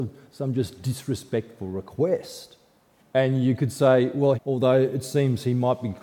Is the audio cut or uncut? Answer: cut